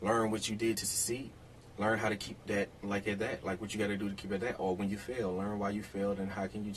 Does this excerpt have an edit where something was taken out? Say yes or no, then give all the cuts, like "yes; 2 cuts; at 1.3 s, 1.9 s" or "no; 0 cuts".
no; 0 cuts